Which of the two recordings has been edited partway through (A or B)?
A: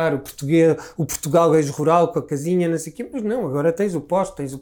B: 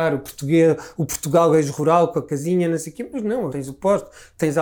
B